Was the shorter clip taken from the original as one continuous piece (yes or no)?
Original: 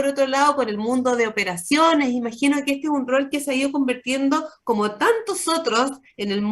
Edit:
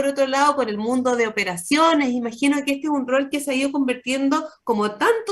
yes